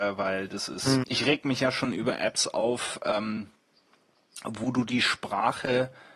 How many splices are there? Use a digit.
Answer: 1